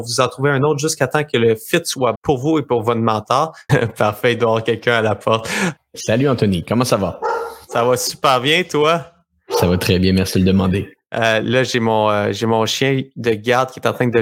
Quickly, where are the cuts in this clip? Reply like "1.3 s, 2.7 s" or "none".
2.1 s, 3.7 s, 5.8 s